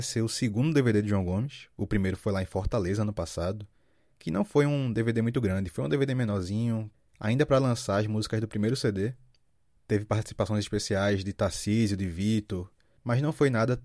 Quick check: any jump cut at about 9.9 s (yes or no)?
no